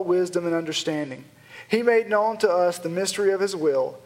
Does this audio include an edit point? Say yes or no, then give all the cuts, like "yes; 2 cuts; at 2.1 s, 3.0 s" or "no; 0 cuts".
no; 0 cuts